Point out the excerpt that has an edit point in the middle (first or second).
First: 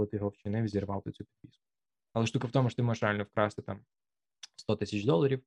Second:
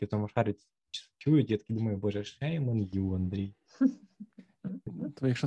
first